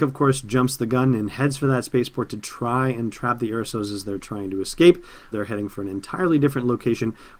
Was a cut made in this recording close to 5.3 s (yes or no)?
yes